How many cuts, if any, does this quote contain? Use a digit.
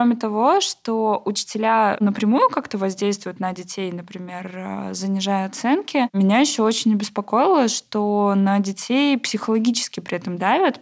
0